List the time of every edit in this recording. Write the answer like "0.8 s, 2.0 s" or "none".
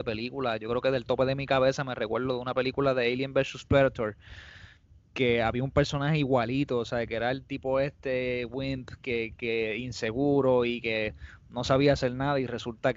none